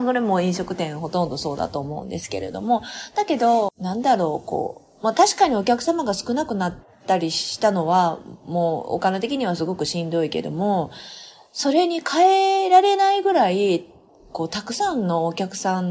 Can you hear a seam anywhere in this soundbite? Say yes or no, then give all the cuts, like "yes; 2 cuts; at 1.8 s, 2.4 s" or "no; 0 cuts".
no; 0 cuts